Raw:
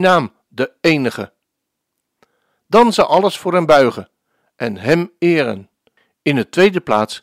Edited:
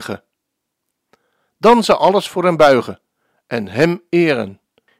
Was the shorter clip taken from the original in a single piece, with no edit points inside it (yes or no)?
yes